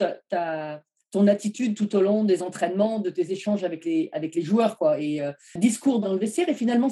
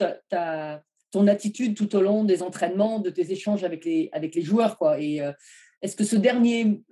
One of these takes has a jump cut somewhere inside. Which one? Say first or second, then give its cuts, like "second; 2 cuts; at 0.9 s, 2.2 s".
first; 1 cut; at 5.6 s